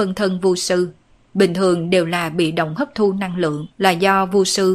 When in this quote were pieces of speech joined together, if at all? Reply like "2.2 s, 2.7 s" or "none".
3.7 s